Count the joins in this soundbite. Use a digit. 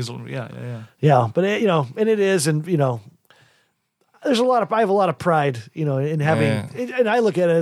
0